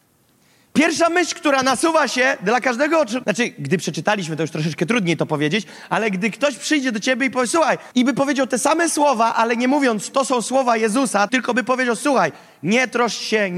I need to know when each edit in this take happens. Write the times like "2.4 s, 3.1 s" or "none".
3.2 s, 7.9 s, 11.3 s

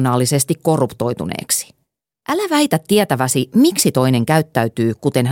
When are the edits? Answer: 2.1 s

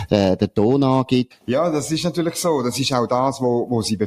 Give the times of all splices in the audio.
1.3 s

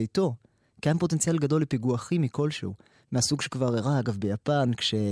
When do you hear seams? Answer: none

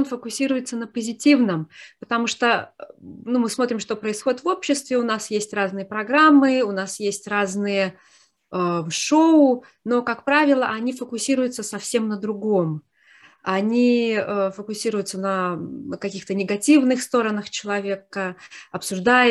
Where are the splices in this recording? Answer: none

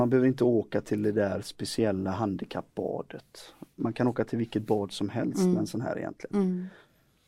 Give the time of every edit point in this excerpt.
none

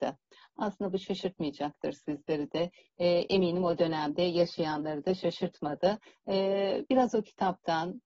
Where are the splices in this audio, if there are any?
none

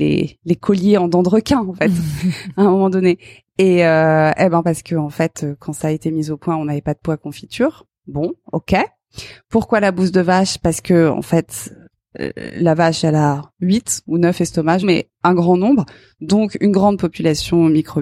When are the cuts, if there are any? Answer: 13.5 s, 14.8 s

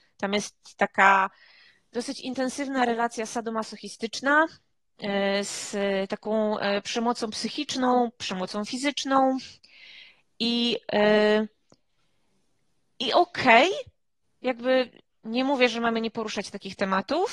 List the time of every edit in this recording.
none

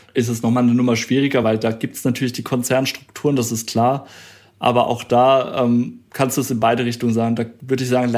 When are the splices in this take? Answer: none

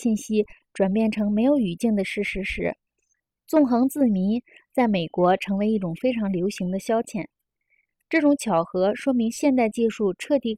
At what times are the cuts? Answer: none

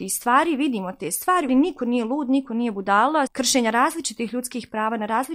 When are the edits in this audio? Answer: 1.5 s, 3.3 s

